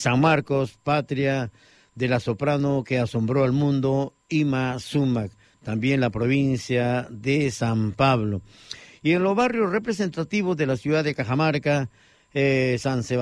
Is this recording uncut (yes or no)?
yes